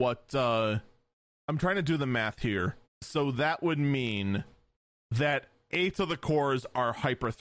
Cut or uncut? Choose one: cut